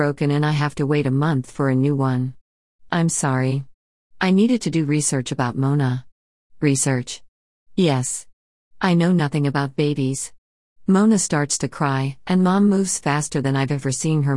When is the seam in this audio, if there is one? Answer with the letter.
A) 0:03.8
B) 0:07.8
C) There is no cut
C